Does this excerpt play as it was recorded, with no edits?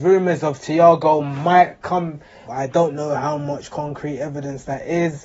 no; 1 cut; at 2.5 s

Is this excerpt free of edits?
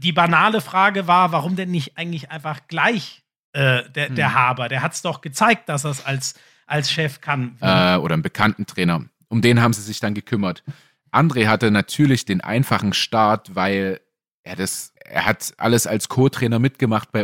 no; 2 cuts; at 7.6 s, 15.0 s

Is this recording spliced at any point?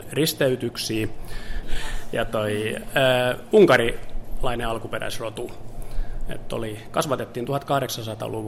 yes; 1 cut; at 1.6 s

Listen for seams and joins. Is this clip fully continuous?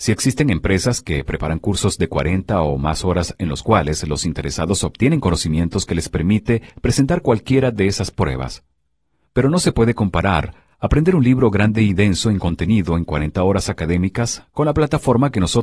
yes; 0 cuts

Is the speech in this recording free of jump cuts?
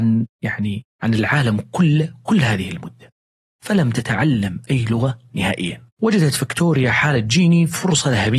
no; 1 cut; at 5.9 s

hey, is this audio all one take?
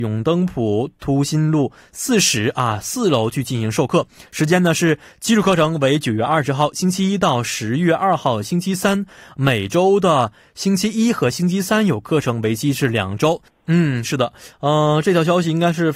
no; 1 cut; at 13.5 s

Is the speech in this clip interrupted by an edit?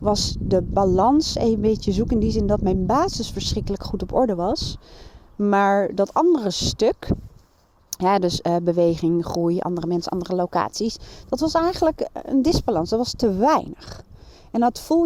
no; 0 cuts

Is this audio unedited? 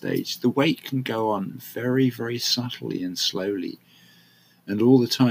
yes; 0 cuts

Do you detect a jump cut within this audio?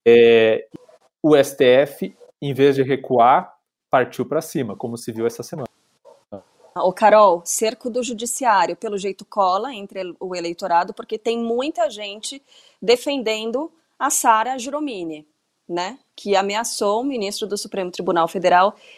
yes; 1 cut; at 6.8 s

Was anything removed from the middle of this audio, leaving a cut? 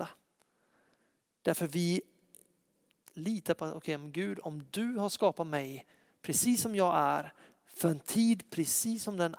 no; 0 cuts

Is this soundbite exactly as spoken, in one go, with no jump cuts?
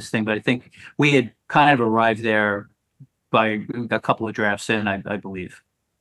yes; 0 cuts

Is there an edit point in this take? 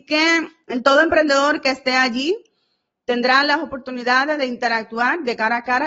no; 0 cuts

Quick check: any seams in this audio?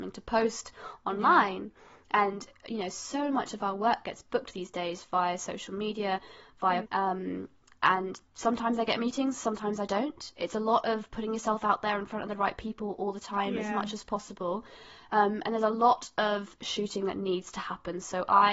yes; 2 cuts; at 6.8 s, 8.3 s

